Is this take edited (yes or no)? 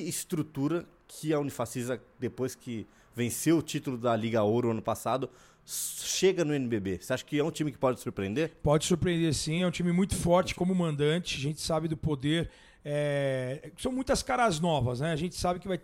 no